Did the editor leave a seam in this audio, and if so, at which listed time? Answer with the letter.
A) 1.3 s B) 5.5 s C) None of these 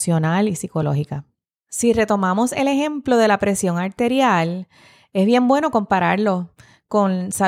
C